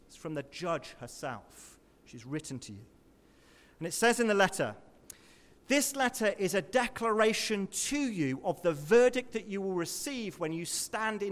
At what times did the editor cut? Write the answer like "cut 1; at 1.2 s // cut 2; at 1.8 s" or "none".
none

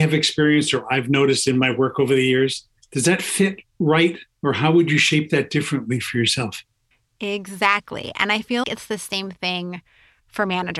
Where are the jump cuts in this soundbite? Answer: cut 1; at 2.8 s // cut 2; at 8.6 s

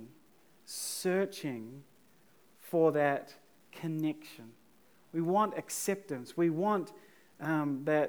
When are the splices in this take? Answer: none

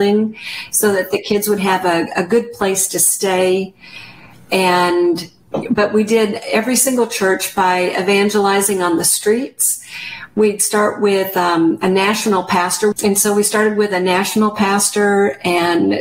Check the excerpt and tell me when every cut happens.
cut 1; at 12.9 s

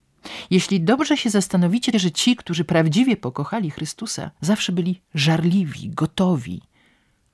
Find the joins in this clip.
cut 1; at 1.9 s // cut 2; at 4.3 s

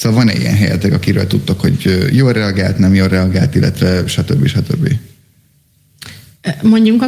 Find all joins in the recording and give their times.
none

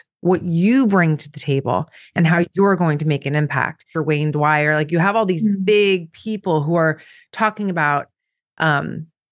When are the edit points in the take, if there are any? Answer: cut 1; at 3.9 s

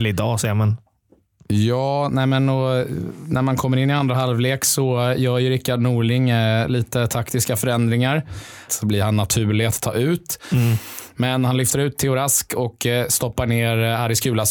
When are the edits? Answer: cut 1; at 8.7 s

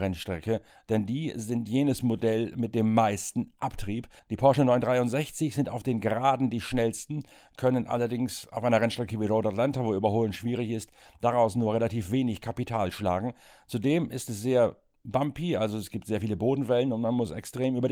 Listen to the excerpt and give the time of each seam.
none

